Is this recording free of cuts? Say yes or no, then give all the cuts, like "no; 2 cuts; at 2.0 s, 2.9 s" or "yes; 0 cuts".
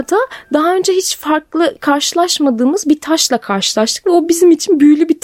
yes; 0 cuts